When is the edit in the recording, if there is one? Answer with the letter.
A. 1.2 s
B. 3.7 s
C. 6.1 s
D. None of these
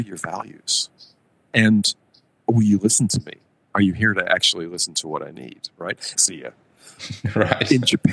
C